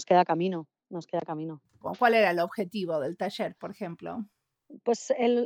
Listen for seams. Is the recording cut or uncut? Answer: cut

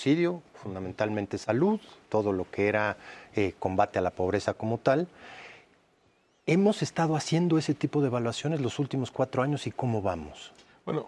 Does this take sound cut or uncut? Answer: cut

